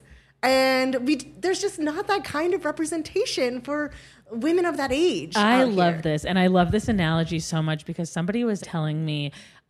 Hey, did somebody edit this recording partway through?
yes; 1 cut; at 8.6 s

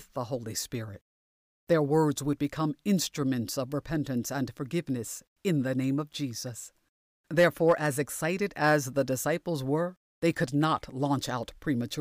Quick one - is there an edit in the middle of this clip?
no; 0 cuts

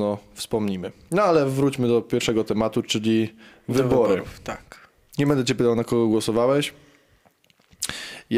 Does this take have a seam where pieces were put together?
no; 0 cuts

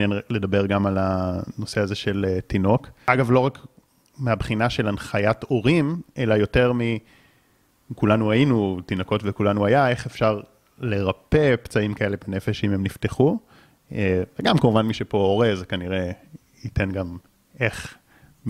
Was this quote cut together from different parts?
no; 0 cuts

